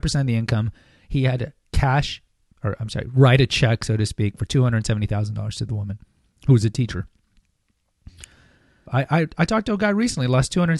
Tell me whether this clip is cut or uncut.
cut